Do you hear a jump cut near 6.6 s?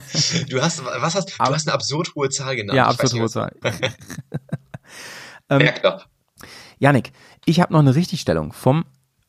no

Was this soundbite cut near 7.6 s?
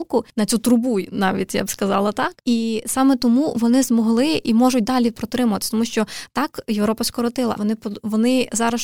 yes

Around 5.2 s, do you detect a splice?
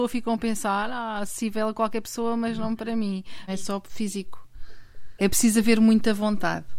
yes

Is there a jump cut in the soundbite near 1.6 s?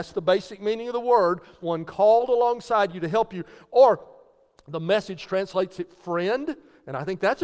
yes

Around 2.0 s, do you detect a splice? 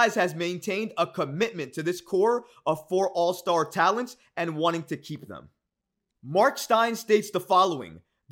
no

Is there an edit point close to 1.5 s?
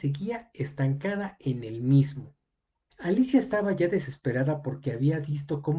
no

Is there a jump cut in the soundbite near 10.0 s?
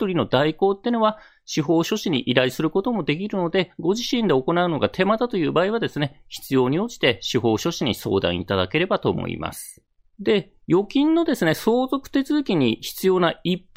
no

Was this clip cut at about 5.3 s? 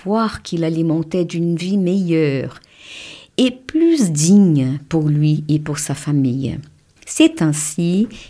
no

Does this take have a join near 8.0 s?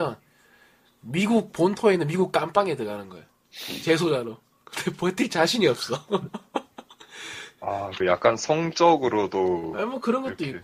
yes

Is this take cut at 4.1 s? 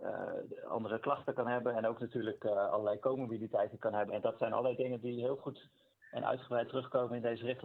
yes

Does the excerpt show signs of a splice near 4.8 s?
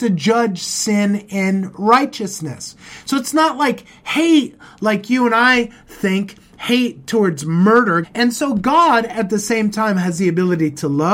no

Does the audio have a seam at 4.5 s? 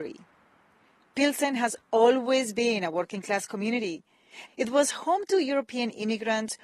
yes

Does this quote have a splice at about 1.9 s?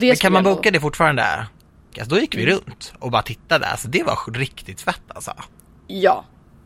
yes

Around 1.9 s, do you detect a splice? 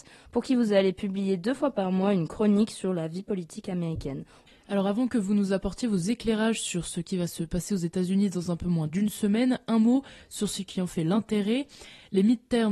no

